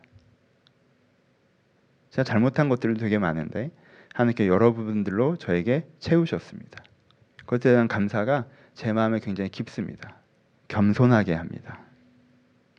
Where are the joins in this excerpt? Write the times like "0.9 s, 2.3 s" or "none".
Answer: 7.3 s, 10.5 s